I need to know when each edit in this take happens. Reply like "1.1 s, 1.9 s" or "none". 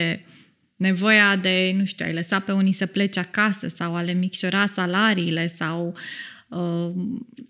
none

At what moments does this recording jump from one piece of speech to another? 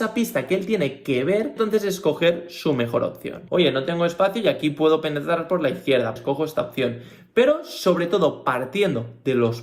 3.5 s, 6.2 s

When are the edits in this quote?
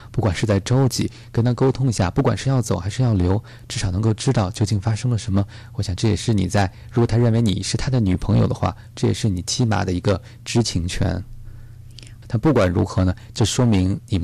12.2 s

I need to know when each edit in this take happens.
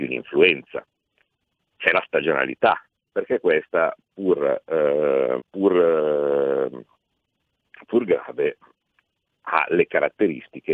1.7 s, 5.4 s

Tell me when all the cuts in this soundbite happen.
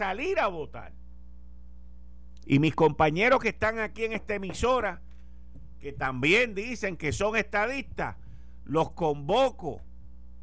2.4 s

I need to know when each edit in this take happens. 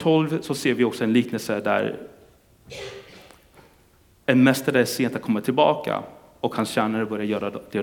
none

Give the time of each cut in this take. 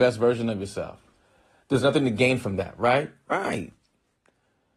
none

